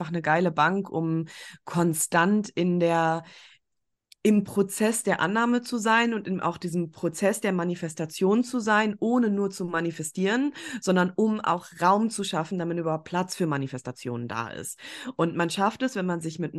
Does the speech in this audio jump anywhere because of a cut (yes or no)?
no